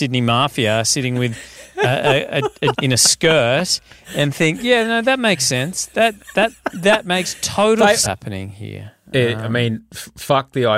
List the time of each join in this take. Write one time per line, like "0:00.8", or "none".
0:02.7
0:08.0